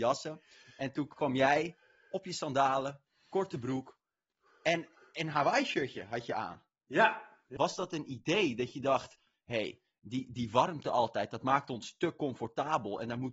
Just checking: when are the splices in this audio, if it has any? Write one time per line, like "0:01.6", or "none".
0:07.6